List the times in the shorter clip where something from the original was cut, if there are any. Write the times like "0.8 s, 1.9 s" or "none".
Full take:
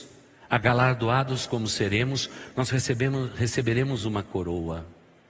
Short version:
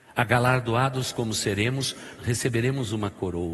2.2 s